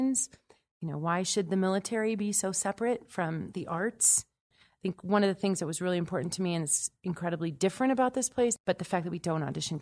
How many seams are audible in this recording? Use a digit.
2